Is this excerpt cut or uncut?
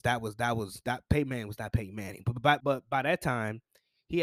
cut